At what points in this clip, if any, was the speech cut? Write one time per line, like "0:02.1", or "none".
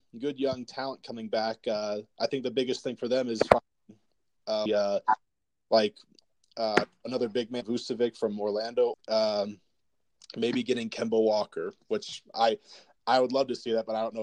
0:04.7
0:07.6
0:08.9